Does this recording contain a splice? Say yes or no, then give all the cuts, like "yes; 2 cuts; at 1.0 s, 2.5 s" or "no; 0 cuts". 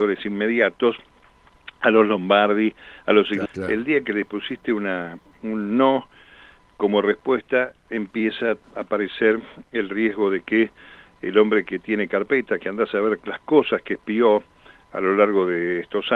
yes; 1 cut; at 3.5 s